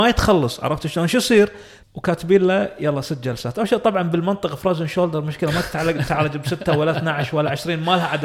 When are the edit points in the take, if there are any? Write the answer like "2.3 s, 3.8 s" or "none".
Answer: 1.8 s

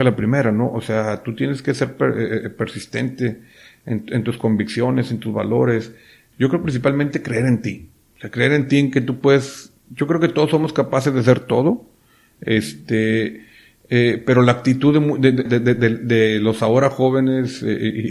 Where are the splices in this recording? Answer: 6.3 s, 15.5 s

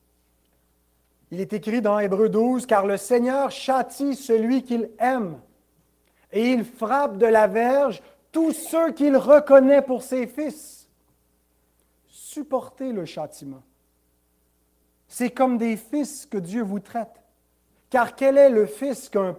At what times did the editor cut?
none

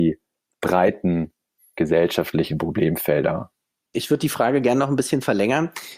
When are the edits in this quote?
none

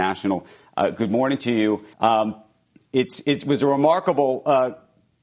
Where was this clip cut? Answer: 1.9 s

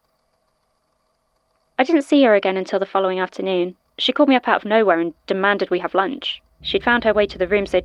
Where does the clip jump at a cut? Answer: 3.9 s, 6.6 s

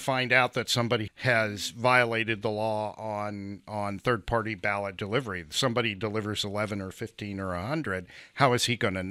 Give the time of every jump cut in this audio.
1.1 s

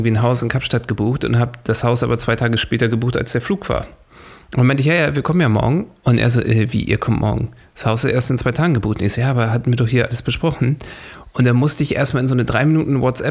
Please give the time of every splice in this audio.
none

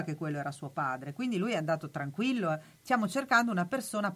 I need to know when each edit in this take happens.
none

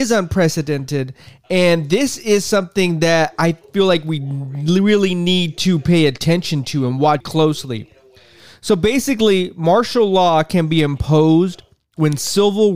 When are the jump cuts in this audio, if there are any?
7.2 s

